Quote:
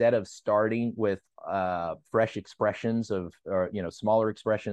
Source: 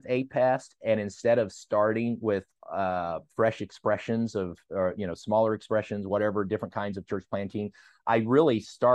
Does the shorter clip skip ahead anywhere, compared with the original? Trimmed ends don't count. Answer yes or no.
no